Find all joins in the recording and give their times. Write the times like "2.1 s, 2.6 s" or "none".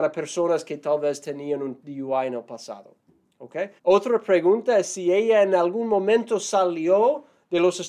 3.8 s